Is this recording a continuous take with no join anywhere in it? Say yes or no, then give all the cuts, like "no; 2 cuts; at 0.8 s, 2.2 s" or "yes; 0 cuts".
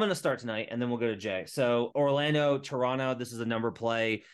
no; 1 cut; at 1.9 s